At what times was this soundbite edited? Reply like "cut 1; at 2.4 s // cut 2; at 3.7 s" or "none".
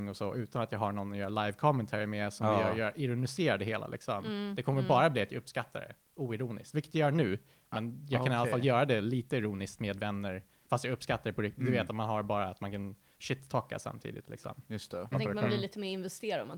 cut 1; at 15.1 s